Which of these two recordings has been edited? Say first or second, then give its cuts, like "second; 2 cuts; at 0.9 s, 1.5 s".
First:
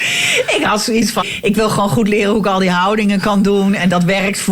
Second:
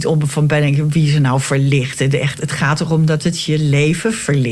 first; 1 cut; at 1.2 s